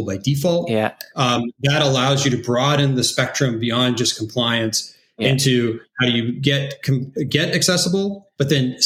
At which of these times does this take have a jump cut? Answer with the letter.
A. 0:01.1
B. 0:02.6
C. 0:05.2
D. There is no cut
D